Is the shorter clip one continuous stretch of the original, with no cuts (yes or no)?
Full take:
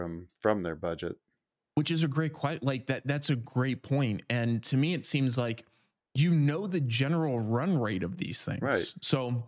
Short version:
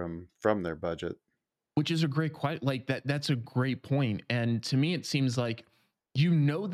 yes